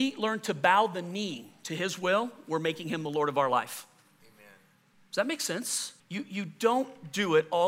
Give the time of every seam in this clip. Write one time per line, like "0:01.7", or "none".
0:06.0